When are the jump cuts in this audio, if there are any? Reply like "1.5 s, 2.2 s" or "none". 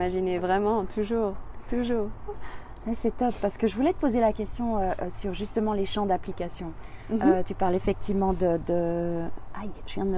none